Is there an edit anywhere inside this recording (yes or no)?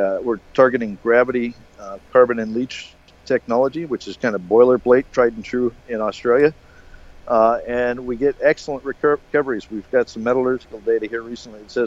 yes